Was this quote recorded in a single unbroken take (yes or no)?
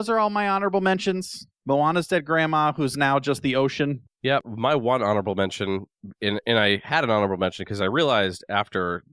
no